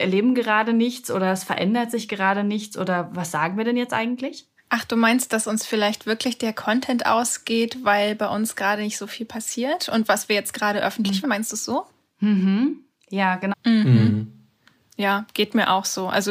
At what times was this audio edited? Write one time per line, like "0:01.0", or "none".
0:11.2
0:13.5